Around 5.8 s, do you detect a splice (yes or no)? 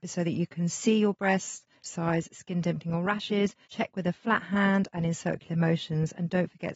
no